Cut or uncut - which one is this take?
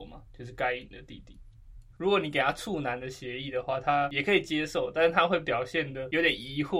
cut